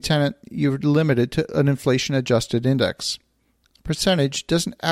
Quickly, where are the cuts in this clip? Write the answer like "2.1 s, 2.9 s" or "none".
none